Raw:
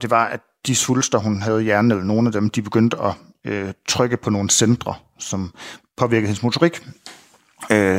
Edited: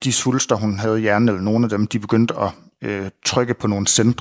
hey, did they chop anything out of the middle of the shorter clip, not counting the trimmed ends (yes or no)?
no